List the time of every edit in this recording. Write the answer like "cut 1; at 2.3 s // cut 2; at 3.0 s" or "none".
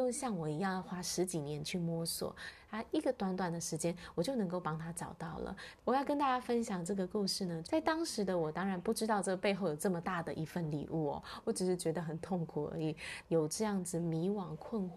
cut 1; at 5.8 s // cut 2; at 7.6 s // cut 3; at 13.2 s